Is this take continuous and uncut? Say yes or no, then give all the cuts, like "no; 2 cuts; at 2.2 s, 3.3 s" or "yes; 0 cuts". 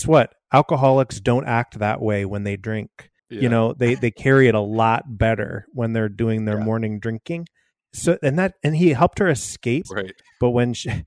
no; 2 cuts; at 3.2 s, 9.8 s